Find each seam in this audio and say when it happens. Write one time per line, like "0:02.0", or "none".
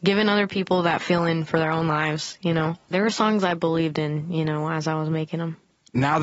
0:02.9